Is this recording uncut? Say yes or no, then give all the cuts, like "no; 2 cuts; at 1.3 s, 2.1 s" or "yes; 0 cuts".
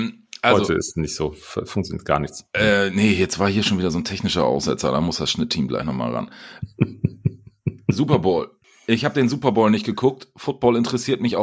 yes; 0 cuts